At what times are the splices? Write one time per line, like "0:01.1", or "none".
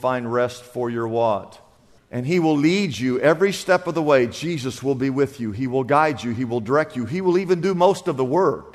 0:02.0

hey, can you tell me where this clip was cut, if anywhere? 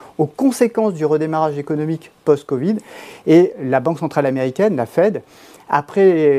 0:03.5

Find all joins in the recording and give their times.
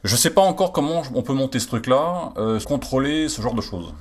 0:02.6

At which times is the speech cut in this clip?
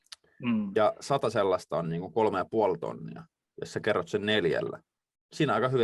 none

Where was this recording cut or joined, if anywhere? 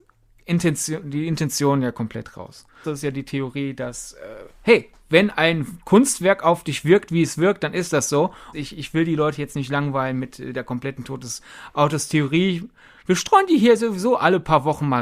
0:02.8
0:08.5

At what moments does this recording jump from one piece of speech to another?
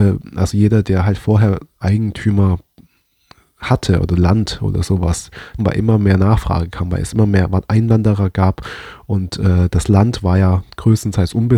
0:05.6

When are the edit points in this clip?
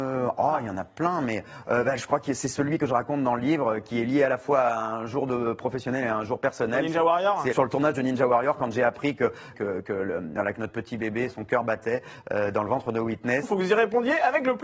0:07.5
0:09.5
0:13.4

